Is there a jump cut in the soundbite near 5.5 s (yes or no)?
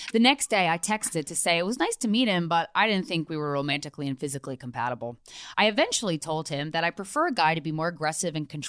yes